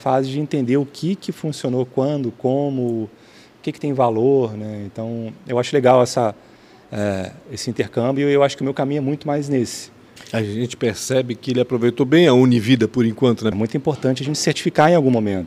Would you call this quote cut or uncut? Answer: cut